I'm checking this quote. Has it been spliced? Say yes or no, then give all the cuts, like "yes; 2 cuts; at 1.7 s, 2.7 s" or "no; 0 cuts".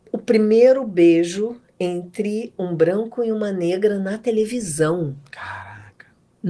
no; 0 cuts